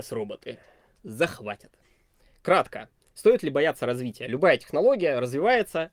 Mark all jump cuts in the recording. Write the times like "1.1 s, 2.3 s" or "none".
none

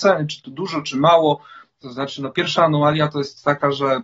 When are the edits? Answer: 1.8 s

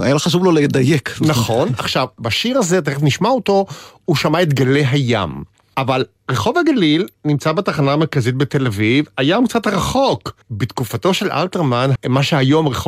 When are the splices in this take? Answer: 10.4 s, 12.0 s

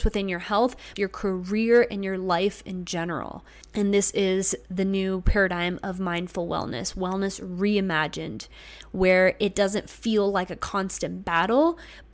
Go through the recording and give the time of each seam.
1.0 s, 3.6 s

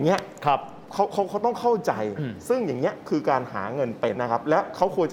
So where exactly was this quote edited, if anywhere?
4.1 s

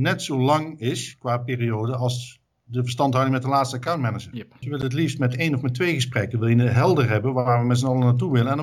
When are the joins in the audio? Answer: 4.6 s

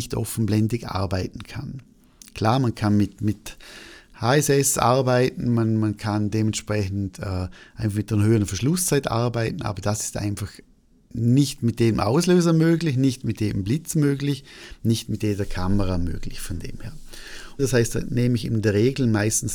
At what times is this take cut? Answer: 17.6 s

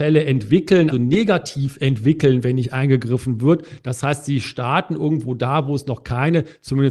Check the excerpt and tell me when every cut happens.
0.9 s

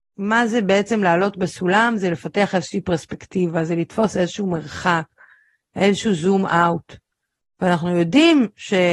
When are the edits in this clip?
none

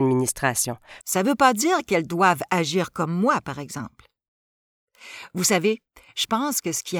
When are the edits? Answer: 1.0 s

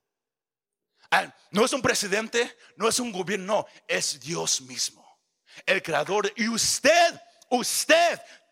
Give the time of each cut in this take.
none

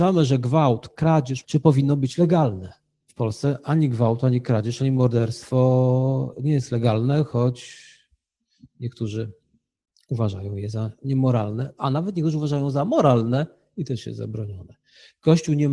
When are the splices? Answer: 1.4 s

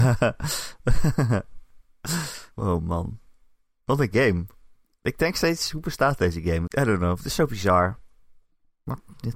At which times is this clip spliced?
2.5 s, 6.7 s

